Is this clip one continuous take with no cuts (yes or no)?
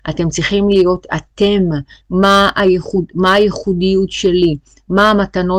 no